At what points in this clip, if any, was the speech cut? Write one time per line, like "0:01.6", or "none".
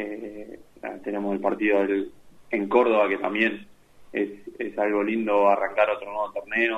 0:02.4